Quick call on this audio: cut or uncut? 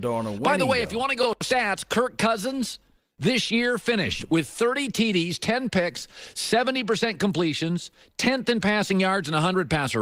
uncut